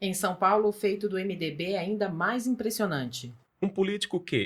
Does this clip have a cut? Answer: yes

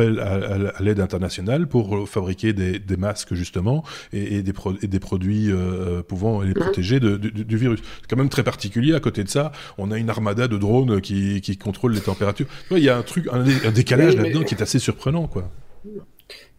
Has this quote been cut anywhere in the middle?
no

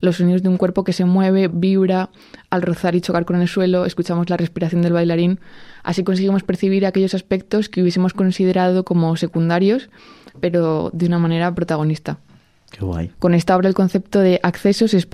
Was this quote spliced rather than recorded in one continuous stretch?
yes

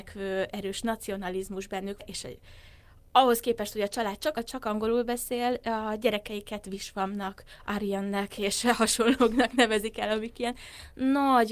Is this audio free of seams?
no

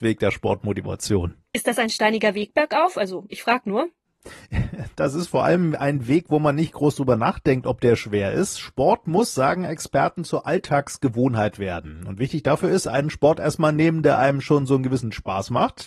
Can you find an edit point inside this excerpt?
no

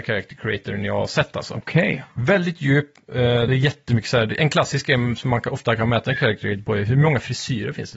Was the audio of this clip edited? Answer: yes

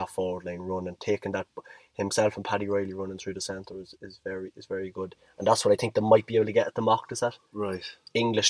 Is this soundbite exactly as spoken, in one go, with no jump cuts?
no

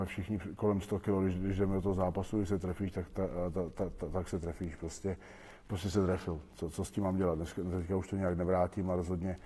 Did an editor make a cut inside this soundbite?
no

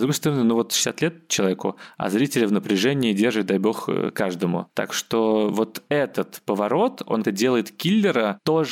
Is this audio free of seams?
no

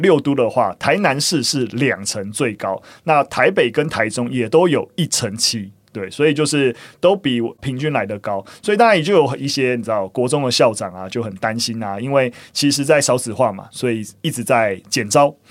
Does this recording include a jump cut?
no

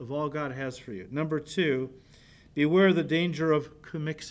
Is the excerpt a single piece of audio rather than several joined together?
yes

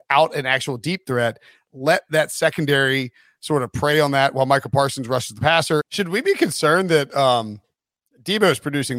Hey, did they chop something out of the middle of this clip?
yes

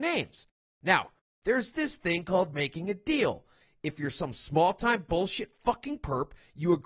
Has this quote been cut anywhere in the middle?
yes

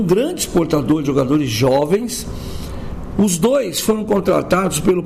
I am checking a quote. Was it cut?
yes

